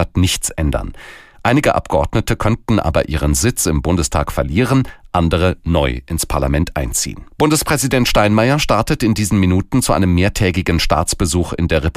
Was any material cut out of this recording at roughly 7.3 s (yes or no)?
yes